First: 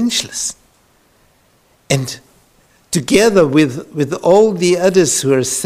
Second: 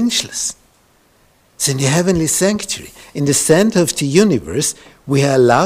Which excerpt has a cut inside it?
second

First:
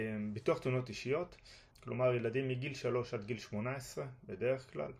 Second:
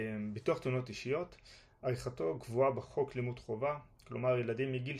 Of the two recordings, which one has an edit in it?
first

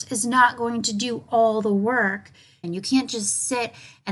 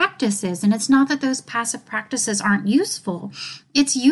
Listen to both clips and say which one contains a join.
first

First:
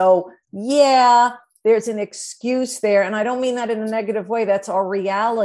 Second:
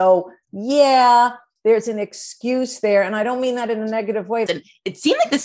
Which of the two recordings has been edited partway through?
second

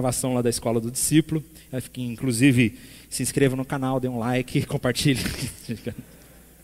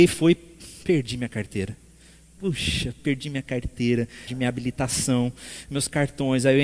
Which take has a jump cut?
second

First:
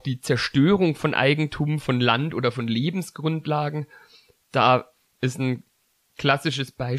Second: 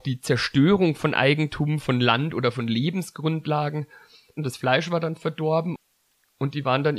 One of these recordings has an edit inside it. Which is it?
second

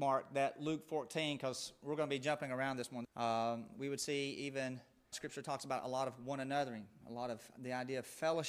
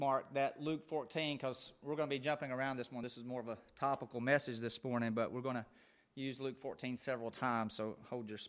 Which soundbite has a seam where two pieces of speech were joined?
first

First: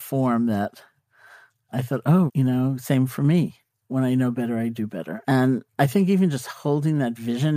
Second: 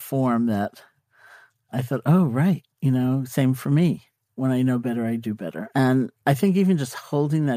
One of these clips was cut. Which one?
first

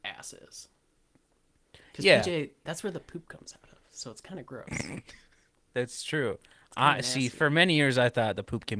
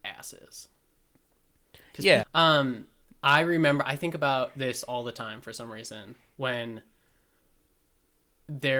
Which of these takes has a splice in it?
second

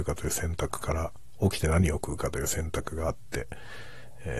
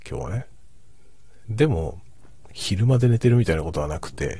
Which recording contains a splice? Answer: second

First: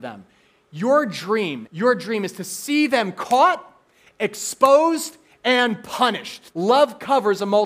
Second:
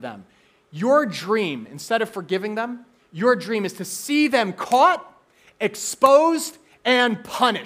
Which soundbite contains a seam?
first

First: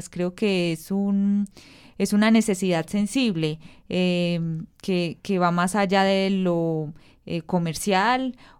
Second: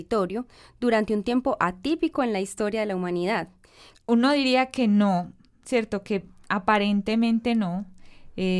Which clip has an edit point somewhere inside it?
second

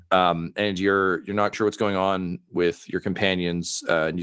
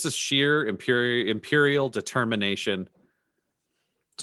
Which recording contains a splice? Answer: first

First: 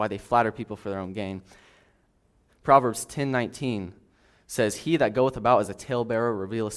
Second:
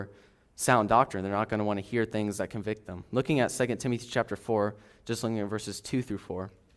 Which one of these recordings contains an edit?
first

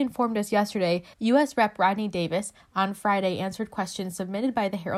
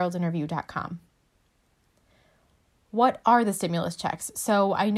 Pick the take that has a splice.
first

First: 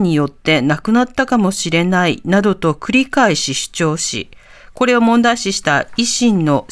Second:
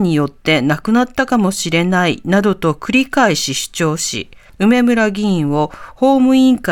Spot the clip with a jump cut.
second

